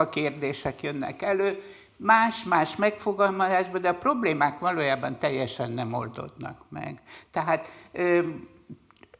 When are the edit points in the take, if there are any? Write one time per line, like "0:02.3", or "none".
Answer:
none